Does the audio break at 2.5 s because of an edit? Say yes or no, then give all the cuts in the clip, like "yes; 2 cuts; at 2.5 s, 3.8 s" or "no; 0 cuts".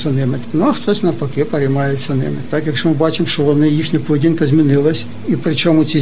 yes; 1 cut; at 2.5 s